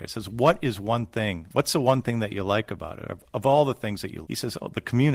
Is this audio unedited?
no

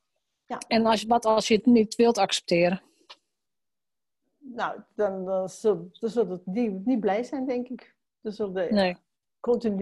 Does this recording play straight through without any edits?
yes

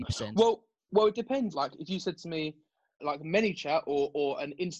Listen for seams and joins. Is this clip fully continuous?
no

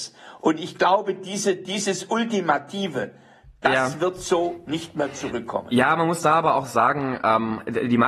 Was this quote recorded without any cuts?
yes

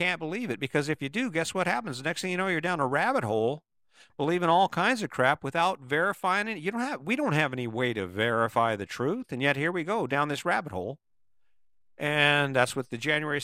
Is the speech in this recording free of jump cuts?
yes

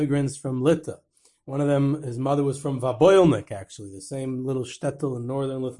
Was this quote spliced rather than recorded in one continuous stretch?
no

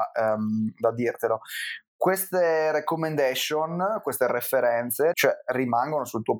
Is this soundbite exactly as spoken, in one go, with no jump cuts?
no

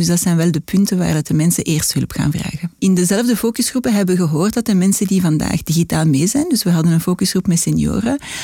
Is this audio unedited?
no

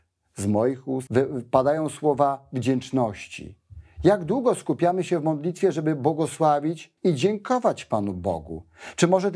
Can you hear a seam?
yes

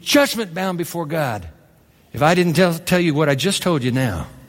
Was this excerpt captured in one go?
yes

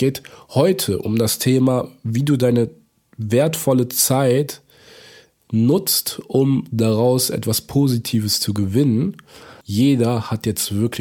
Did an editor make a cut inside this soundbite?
yes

